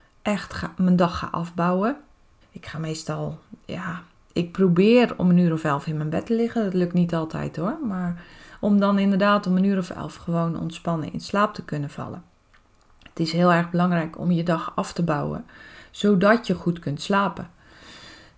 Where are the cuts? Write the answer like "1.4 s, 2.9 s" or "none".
2.4 s